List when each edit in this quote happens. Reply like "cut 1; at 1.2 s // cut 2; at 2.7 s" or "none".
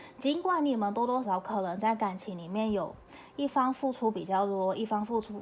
cut 1; at 1.2 s

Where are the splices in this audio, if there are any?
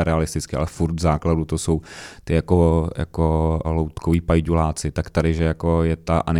cut 1; at 3.6 s

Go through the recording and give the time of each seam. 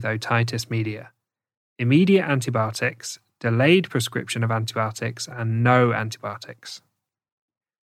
none

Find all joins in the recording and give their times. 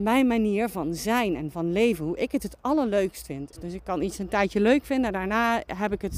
cut 1; at 3.5 s

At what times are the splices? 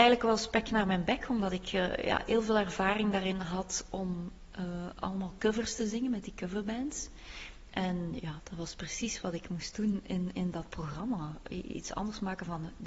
none

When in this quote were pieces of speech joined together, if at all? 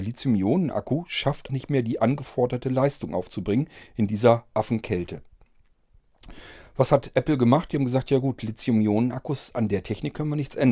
cut 1; at 1.5 s

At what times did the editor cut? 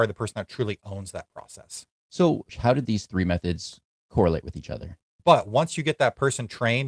cut 1; at 2.5 s // cut 2; at 5.2 s

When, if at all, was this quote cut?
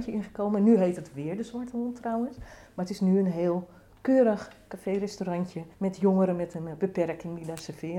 cut 1; at 5.7 s

